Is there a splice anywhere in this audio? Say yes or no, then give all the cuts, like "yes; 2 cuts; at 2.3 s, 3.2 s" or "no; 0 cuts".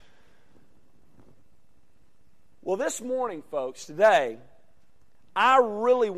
no; 0 cuts